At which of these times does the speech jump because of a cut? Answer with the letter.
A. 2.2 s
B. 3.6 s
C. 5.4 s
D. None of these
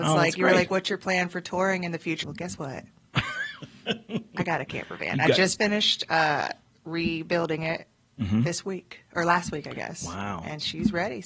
A